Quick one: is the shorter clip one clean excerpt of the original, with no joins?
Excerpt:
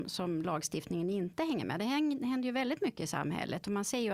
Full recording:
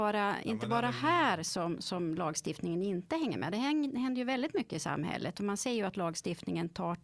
yes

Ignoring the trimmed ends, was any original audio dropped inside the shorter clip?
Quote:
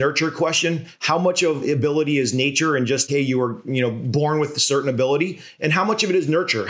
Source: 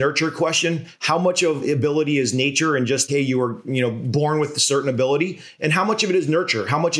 no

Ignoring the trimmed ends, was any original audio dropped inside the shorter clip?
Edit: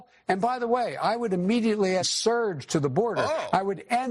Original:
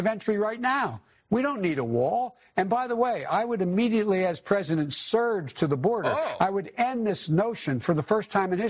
yes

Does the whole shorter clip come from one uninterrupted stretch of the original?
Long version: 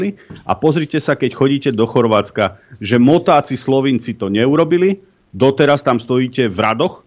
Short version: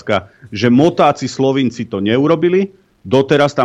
yes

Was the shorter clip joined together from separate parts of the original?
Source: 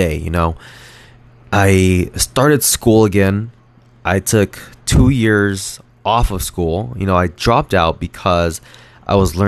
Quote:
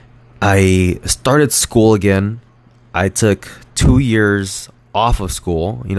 no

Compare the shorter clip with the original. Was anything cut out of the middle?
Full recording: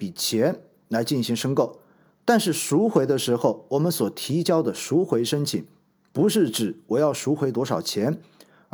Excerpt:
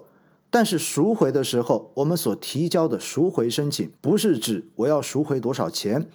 yes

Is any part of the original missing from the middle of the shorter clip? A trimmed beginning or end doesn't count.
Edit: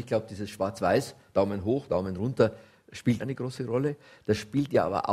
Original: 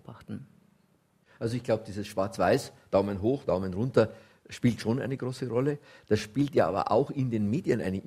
yes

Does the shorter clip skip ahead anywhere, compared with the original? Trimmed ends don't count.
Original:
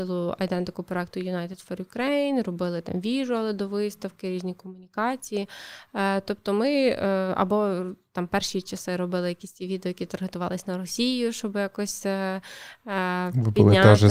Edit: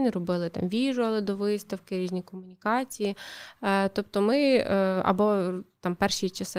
no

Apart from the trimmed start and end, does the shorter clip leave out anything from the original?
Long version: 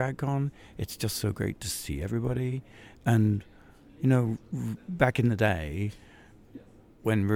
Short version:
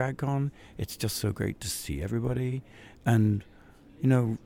no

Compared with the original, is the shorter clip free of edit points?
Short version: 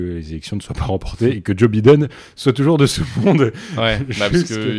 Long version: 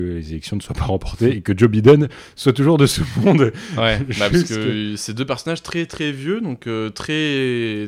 yes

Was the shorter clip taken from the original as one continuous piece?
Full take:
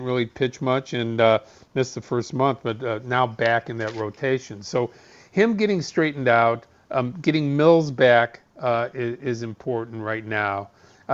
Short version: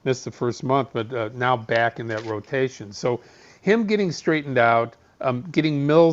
yes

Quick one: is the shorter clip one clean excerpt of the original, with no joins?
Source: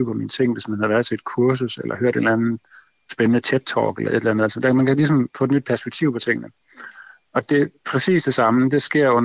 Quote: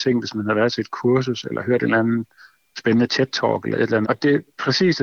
no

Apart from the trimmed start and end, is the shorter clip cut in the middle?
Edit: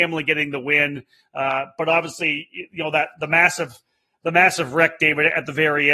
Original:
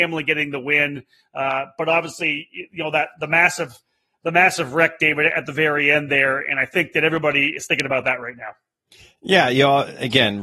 no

